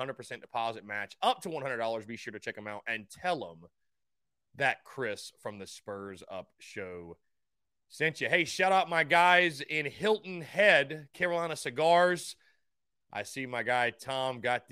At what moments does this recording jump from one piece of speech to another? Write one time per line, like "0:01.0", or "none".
none